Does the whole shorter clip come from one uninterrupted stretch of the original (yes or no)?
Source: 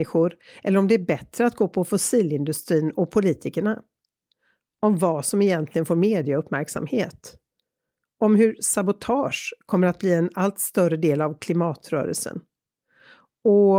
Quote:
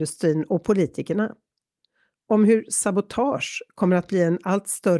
no